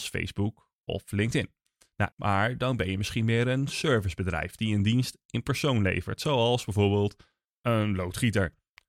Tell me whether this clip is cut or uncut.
cut